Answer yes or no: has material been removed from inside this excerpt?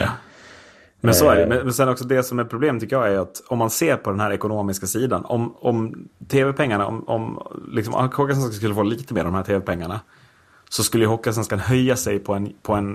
no